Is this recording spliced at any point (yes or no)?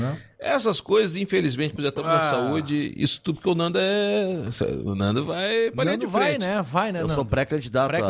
yes